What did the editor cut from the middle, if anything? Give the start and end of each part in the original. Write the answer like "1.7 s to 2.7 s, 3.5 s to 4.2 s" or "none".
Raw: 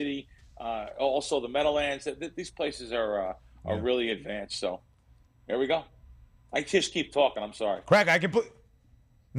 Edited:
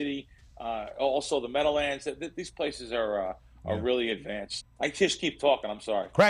4.6 s to 6.3 s

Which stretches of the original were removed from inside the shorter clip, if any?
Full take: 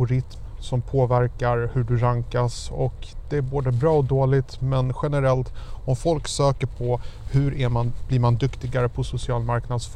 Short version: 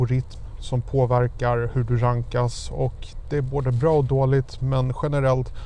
none

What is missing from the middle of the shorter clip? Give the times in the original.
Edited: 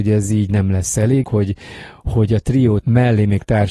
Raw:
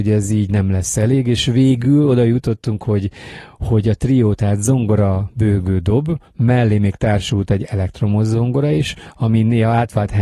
1.2 s to 2.8 s, 4.4 s to 6.3 s

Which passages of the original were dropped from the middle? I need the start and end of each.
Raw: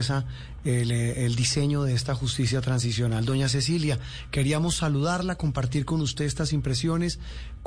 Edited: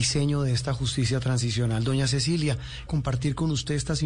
4.3 s to 5.4 s

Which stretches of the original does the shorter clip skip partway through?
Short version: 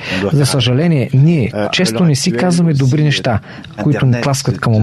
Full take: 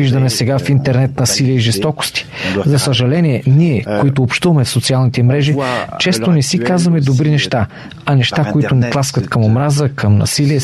4.0 s to 5.9 s, 8.0 s to 8.5 s

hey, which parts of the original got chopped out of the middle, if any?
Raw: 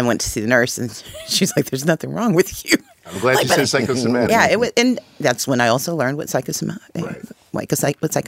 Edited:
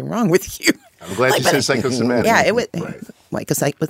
4.7 s to 6.9 s

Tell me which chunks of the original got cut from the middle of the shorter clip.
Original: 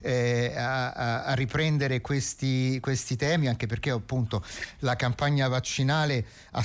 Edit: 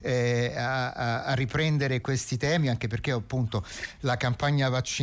2.0 s to 2.8 s

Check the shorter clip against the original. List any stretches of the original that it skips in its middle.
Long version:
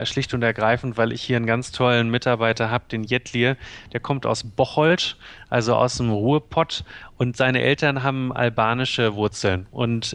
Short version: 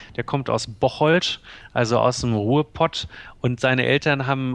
none

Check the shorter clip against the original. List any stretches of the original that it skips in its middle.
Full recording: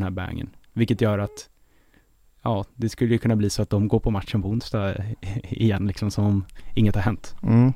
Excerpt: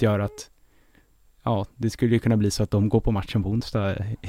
none

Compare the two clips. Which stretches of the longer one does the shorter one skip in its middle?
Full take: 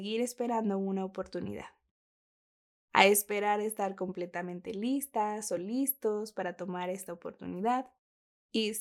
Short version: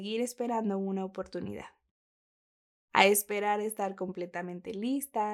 none

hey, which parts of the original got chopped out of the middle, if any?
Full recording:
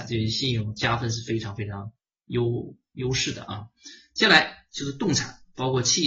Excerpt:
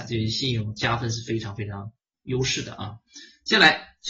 2.1 s to 2.8 s

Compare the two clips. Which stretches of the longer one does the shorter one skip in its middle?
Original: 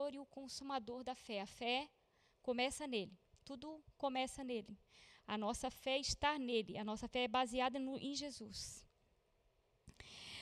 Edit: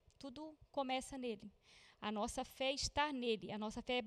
none

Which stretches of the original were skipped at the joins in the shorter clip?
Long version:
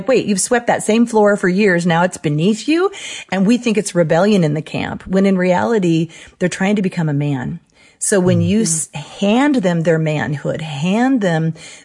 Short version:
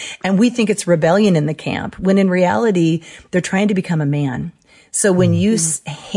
none

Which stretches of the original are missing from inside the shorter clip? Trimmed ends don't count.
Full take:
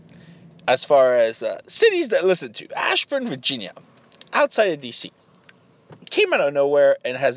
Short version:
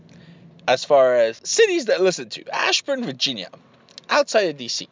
1.4 s to 1.6 s

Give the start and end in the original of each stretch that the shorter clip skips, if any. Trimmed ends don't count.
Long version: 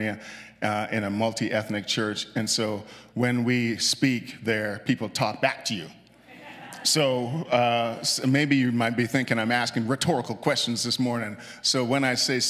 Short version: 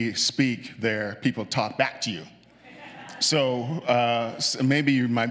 none

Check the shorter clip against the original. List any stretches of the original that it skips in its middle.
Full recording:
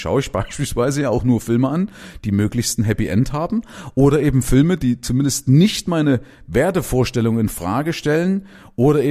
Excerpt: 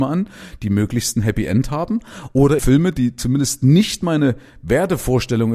4.2 s to 4.4 s

